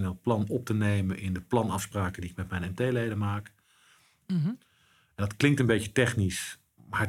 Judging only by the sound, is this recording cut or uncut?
cut